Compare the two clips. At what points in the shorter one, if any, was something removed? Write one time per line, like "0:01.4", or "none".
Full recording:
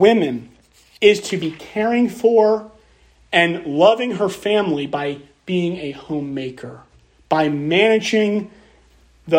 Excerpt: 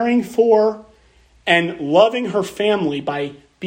none